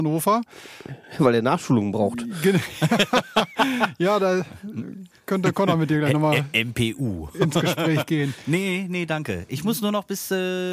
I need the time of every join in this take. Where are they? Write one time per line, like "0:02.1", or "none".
none